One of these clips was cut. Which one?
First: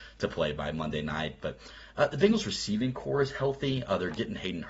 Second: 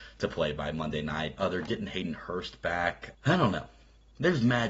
second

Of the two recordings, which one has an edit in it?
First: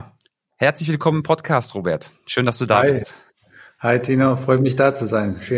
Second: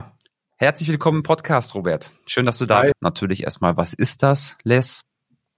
second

